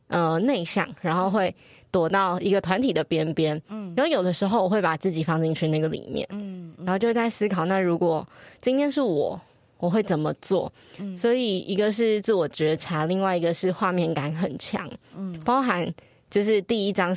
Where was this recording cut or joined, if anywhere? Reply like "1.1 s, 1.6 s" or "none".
none